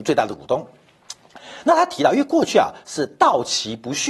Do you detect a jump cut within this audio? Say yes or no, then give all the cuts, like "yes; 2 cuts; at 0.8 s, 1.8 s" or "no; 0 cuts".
no; 0 cuts